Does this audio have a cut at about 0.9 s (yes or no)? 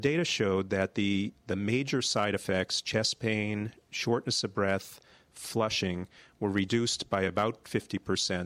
no